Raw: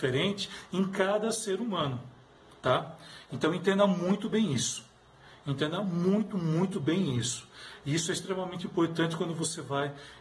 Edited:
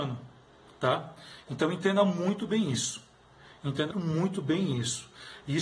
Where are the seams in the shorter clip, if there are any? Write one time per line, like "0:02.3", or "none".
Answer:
0:03.9